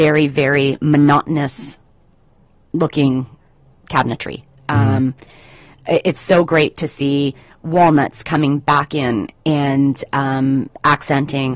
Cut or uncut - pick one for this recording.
uncut